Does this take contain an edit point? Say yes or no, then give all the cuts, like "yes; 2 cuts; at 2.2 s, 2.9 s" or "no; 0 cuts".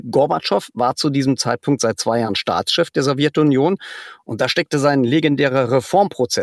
no; 0 cuts